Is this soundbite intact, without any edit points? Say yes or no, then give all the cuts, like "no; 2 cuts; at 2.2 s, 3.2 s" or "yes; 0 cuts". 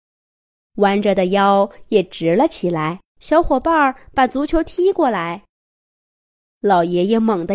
no; 1 cut; at 3.1 s